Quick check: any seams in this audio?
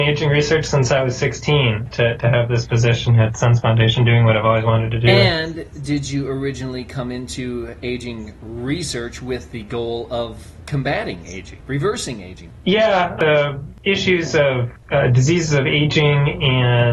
yes; 1 cut; at 1.9 s

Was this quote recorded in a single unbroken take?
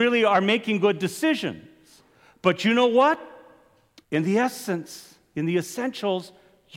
no; 1 cut; at 4.0 s

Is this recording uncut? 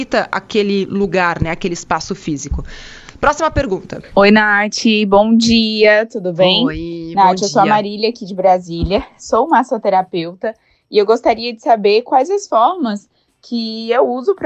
yes; 0 cuts

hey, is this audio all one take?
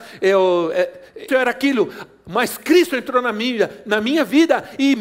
no; 1 cut; at 1.3 s

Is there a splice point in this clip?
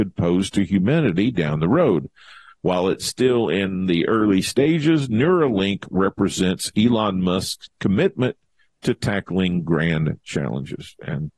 no; 0 cuts

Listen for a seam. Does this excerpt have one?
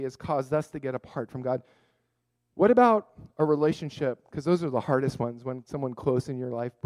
no; 0 cuts

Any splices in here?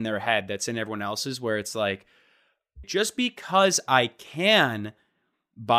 yes; 1 cut; at 2.8 s

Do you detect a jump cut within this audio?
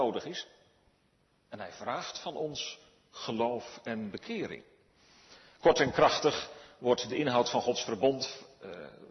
no; 0 cuts

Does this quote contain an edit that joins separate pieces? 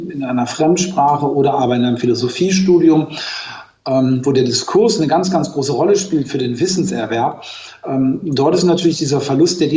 no; 0 cuts

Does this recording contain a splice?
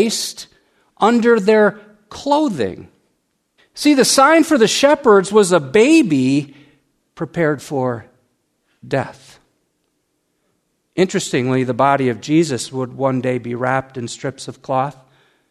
yes; 1 cut; at 3.6 s

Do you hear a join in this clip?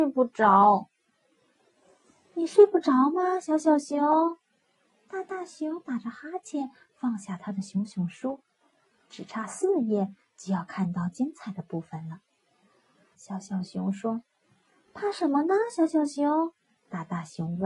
yes; 1 cut; at 13.1 s

